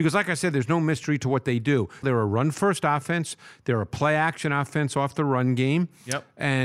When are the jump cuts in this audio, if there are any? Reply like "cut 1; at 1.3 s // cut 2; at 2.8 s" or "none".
cut 1; at 2.0 s